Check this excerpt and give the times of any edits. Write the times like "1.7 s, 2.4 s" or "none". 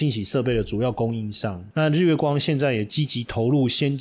1.7 s